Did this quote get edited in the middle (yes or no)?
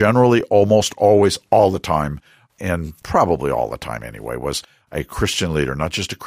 no